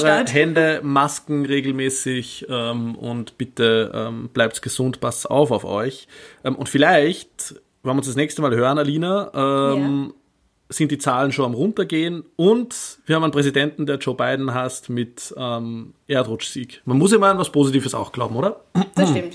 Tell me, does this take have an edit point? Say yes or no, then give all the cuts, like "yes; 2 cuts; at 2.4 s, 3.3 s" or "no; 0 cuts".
yes; 1 cut; at 16.8 s